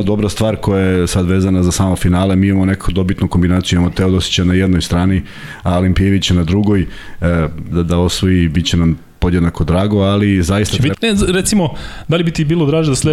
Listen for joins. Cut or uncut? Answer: cut